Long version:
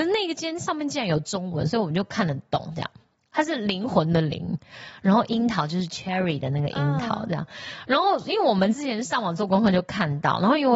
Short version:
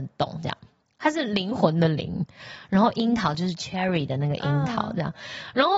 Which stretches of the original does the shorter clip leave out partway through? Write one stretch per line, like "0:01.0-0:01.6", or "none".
none